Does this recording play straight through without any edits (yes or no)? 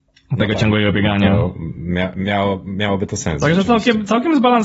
yes